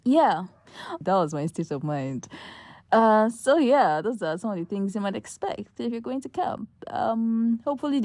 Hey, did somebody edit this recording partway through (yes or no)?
yes